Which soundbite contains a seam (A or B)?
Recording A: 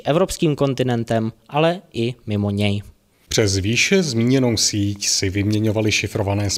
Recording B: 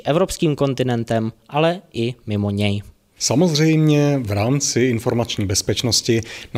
B